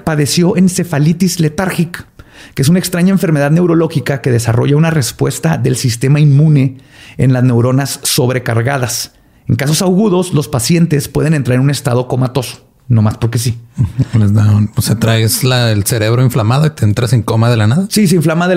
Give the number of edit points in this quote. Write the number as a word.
zero